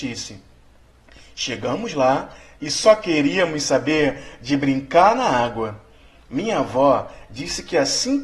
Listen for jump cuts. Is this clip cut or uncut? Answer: uncut